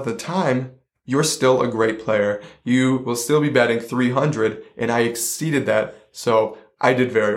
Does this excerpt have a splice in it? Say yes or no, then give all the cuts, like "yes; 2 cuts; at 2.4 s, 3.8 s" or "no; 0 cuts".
no; 0 cuts